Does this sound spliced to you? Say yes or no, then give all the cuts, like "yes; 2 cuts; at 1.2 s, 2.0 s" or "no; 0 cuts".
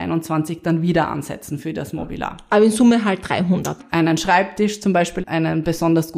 yes; 2 cuts; at 3.8 s, 5.2 s